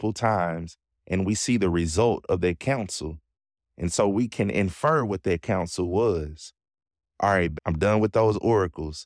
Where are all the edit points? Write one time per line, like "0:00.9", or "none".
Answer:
0:07.6